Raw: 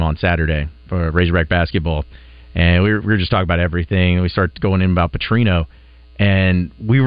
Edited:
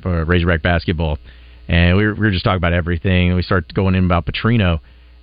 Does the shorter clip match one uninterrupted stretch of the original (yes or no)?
yes